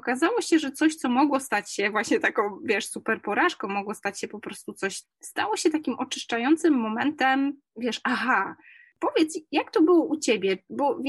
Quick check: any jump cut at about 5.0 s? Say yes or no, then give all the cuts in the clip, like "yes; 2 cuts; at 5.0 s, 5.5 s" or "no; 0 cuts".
yes; 1 cut; at 5.0 s